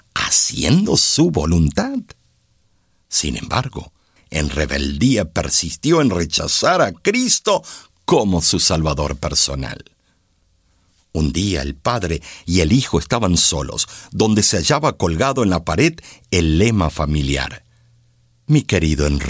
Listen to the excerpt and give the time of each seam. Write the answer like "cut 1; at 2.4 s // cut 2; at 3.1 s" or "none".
cut 1; at 4.2 s